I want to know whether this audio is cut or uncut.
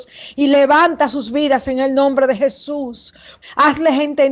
cut